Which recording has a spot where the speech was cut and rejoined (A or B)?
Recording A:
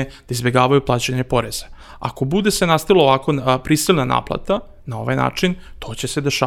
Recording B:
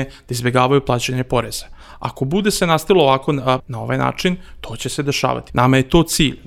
B